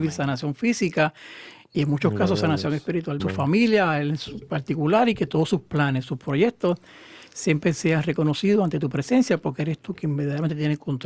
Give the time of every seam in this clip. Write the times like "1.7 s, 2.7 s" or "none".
3.2 s